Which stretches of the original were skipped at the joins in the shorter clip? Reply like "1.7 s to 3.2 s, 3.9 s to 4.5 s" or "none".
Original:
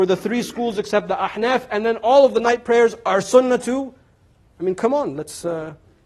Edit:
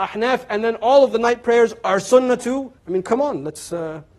4.0 s to 4.5 s

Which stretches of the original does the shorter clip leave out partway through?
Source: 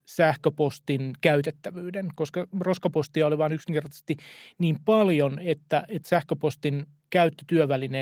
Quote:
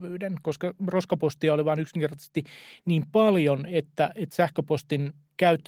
none

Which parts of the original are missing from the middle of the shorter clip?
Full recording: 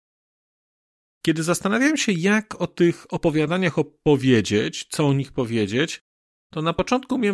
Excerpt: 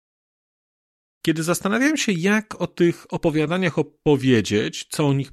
none

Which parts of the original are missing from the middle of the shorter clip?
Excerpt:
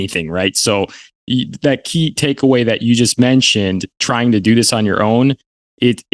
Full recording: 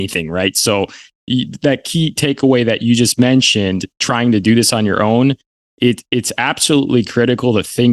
none

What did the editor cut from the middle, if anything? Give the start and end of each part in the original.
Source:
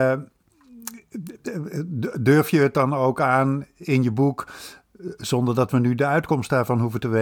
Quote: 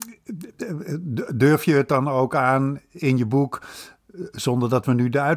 none

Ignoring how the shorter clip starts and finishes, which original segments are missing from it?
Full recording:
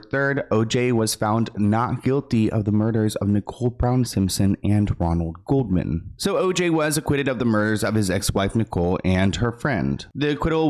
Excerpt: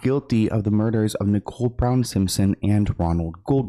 none

